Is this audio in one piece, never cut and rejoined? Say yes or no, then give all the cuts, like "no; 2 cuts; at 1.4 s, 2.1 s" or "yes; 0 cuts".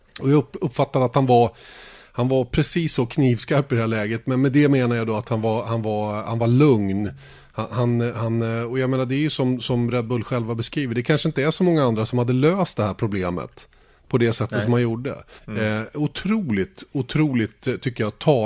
no; 1 cut; at 15.4 s